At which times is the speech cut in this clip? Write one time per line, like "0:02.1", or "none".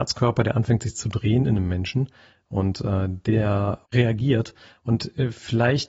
0:03.8